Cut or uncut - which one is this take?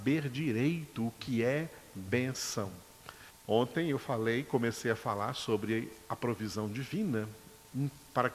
cut